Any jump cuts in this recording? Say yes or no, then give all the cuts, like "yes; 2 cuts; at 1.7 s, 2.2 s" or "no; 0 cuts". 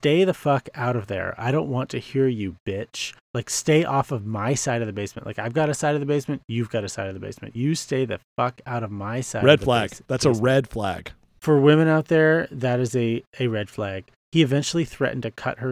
no; 0 cuts